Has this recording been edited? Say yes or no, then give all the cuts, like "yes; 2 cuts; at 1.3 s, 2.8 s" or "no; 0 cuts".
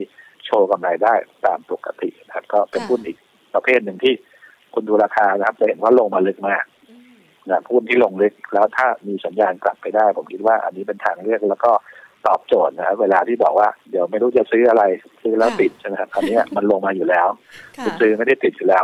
yes; 1 cut; at 13.8 s